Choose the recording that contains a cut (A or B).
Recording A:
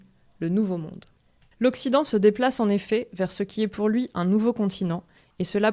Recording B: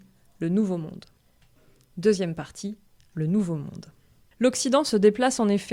A